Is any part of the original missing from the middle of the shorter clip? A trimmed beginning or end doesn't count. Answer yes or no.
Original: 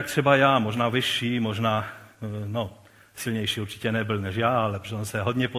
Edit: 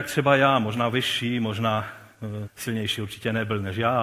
yes